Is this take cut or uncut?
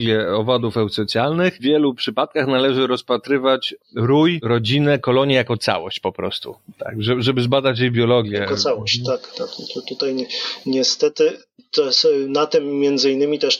uncut